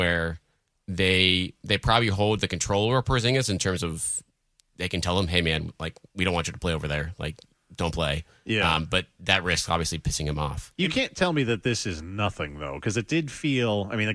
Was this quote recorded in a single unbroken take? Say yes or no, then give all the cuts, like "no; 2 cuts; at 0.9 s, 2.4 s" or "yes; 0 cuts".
yes; 0 cuts